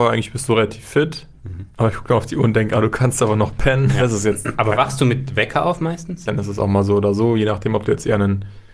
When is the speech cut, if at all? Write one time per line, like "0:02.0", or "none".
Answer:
0:01.7
0:04.0
0:06.3